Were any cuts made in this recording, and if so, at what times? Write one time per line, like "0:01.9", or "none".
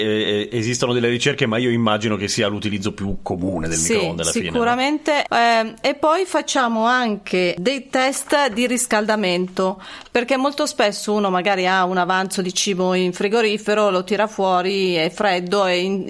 0:05.3